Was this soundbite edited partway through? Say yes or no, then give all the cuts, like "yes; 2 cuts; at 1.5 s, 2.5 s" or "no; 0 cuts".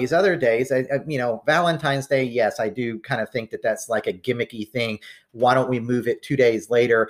no; 0 cuts